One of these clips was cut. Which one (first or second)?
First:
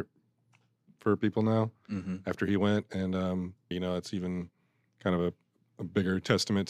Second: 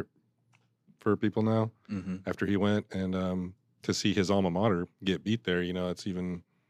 first